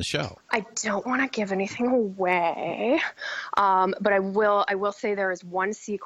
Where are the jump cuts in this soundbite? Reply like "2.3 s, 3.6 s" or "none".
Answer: none